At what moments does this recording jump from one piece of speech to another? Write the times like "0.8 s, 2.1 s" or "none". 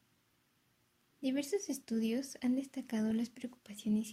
1.1 s